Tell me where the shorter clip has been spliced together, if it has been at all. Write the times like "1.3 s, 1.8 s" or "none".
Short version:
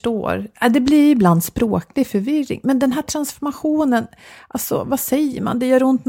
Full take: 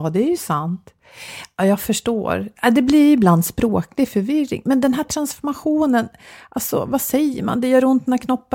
none